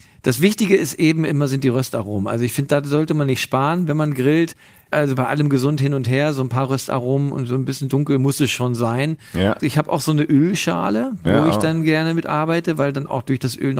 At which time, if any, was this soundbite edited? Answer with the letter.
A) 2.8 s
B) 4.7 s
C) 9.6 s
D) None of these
C